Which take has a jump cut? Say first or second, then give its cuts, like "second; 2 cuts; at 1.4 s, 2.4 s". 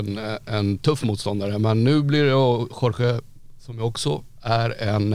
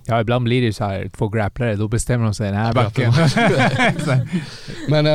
second; 1 cut; at 2.7 s